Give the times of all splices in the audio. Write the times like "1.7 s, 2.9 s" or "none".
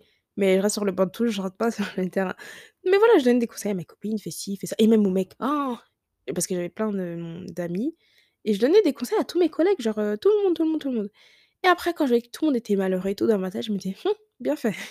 none